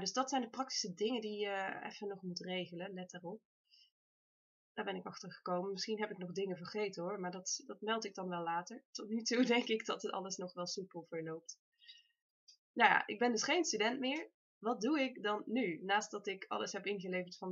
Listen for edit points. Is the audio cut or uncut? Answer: uncut